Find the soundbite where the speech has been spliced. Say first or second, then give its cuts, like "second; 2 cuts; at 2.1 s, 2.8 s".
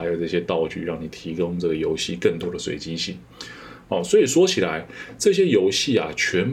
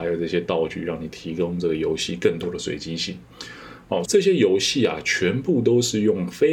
second; 1 cut; at 4.1 s